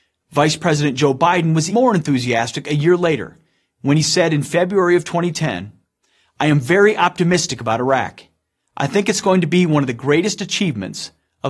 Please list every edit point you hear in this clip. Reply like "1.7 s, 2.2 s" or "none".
1.7 s